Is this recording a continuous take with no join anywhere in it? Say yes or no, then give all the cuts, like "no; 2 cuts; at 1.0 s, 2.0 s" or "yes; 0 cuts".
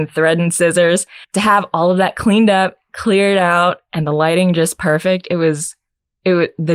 no; 1 cut; at 1.2 s